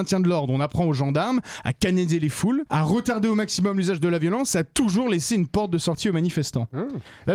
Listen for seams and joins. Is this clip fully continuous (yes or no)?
yes